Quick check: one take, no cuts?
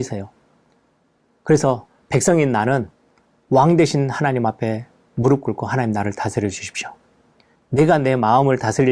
yes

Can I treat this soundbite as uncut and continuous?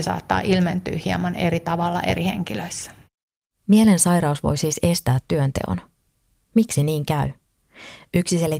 yes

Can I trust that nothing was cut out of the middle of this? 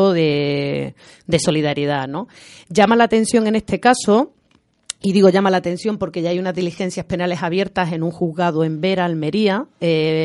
yes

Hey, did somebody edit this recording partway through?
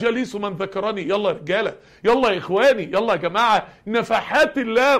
no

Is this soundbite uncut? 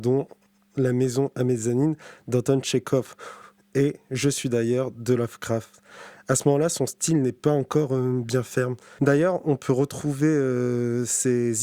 yes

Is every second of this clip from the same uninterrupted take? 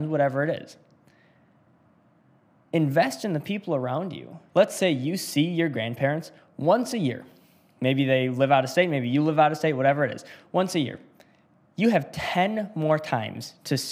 no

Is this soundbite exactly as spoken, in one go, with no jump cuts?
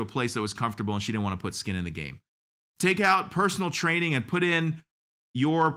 yes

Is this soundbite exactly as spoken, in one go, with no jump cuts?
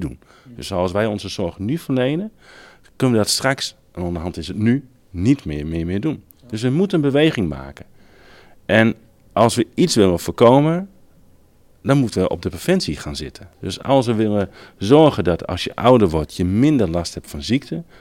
yes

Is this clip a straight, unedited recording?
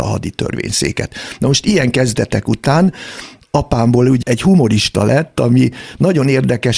no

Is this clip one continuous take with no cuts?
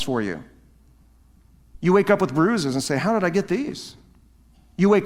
no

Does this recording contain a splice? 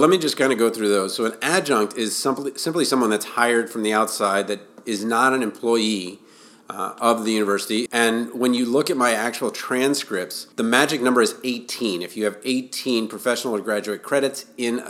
yes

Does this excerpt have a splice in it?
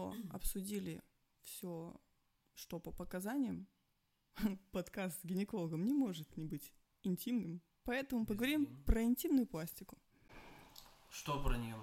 no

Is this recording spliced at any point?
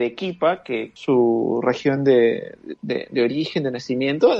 no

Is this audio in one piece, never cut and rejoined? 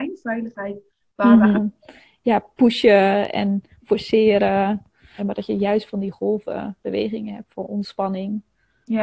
no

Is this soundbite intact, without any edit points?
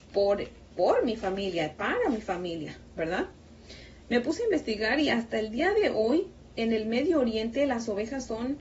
yes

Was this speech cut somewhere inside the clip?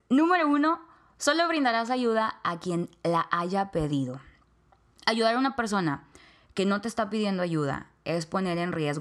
no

